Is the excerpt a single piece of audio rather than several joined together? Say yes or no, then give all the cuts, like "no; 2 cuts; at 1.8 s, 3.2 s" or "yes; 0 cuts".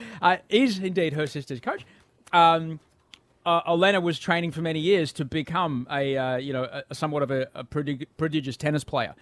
yes; 0 cuts